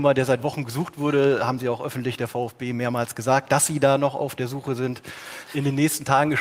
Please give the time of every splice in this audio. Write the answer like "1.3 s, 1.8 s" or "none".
5.5 s